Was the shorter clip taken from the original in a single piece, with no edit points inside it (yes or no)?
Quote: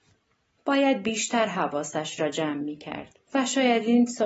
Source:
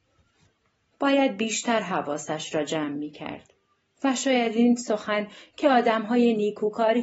no